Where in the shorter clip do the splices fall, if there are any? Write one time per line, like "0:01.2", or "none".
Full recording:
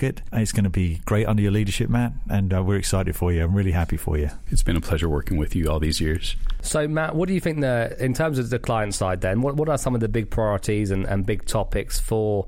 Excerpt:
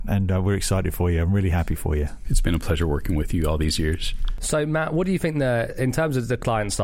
none